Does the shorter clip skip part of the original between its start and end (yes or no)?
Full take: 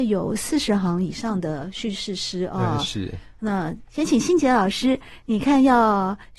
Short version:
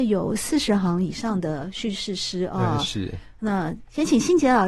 no